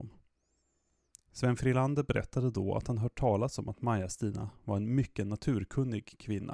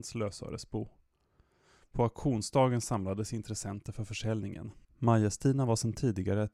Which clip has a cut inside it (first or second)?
second